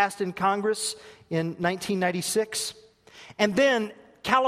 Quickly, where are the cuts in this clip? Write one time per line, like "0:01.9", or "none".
none